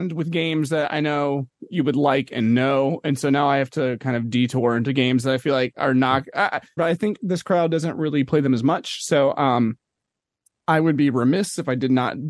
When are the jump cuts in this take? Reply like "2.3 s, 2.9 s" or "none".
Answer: 6.8 s